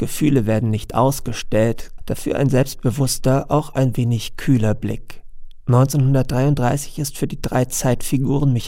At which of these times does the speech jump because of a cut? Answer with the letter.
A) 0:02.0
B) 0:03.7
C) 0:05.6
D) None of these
A